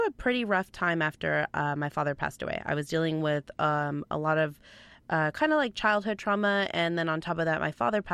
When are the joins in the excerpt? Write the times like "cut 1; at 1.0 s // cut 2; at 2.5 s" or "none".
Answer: none